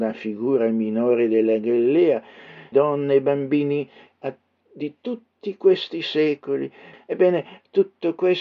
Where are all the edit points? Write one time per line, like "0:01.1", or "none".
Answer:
0:02.7
0:06.9